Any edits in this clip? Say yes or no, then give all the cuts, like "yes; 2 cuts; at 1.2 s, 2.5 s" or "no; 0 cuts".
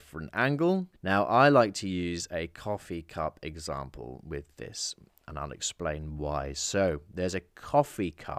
yes; 1 cut; at 0.9 s